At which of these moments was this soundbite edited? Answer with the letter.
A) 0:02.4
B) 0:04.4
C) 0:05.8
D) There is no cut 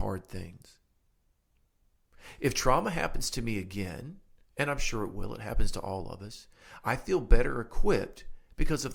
D